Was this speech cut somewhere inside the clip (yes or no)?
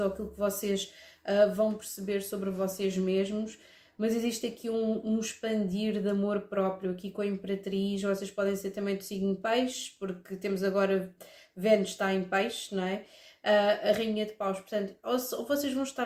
no